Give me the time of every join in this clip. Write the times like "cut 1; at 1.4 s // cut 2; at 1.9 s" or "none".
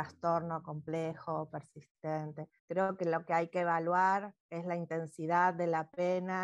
cut 1; at 2.6 s // cut 2; at 4.4 s